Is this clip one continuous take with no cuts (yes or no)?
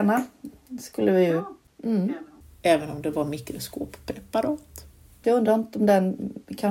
no